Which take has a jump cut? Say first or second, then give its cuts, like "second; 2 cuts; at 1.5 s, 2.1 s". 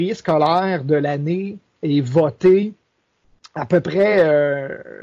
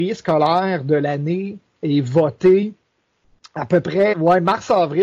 second; 1 cut; at 4.1 s